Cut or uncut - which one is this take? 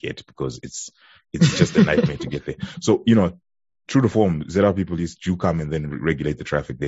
uncut